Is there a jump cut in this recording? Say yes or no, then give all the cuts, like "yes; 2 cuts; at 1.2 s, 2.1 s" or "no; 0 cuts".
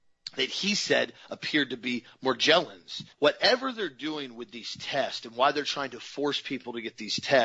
yes; 1 cut; at 3.1 s